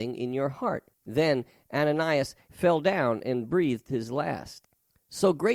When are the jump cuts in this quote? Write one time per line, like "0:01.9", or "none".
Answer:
0:00.9
0:02.5